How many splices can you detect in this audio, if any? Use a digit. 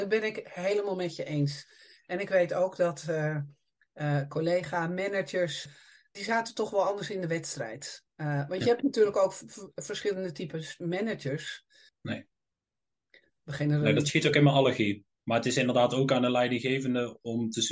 2